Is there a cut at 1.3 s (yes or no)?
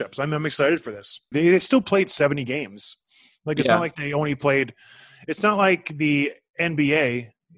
yes